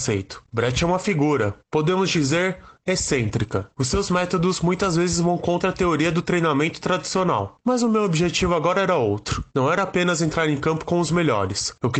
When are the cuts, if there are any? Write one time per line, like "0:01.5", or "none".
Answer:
0:07.6